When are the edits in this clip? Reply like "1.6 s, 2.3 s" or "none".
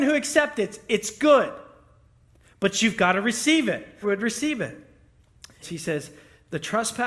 4.0 s, 5.6 s